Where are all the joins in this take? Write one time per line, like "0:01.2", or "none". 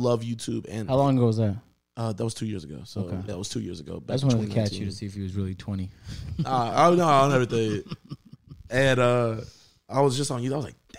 0:03.3